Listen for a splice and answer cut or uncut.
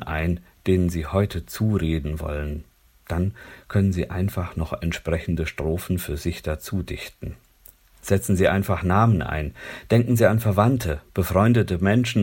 uncut